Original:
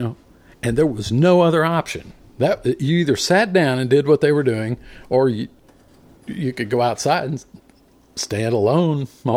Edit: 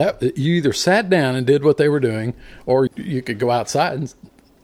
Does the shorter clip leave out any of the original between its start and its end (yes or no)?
yes